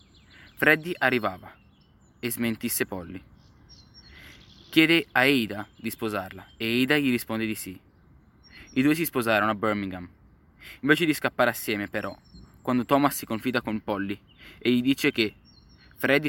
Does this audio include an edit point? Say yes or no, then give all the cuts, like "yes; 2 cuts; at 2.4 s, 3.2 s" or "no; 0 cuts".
no; 0 cuts